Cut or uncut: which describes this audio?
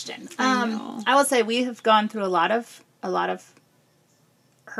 uncut